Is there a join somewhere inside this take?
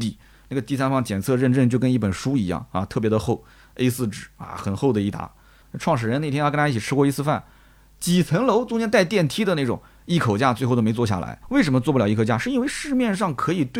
yes; 1 cut; at 5.6 s

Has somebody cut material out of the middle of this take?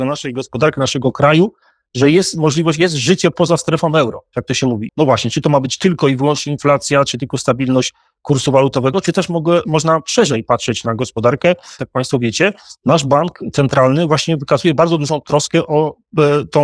yes; 2 cuts; at 4.9 s, 11.8 s

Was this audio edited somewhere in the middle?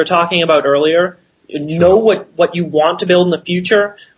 no; 0 cuts

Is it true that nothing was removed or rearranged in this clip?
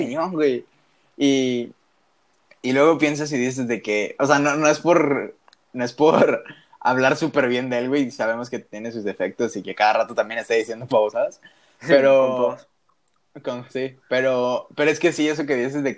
no; 1 cut; at 10.9 s

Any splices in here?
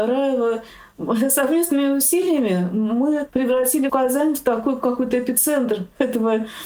no; 0 cuts

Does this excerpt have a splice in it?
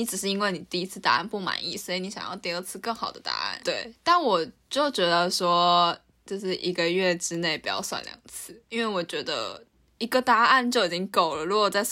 yes; 1 cut; at 3.6 s

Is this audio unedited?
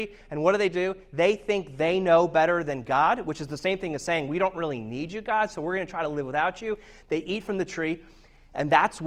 yes; 0 cuts

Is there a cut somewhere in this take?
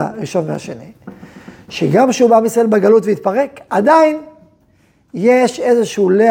no; 0 cuts

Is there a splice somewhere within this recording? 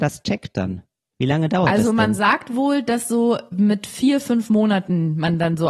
no; 0 cuts

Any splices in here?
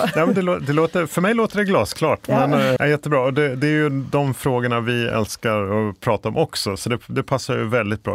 yes; 1 cut; at 2.8 s

